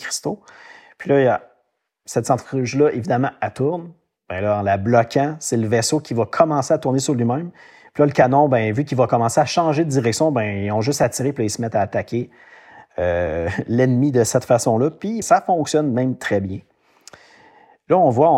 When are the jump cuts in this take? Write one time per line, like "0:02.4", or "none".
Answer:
0:15.2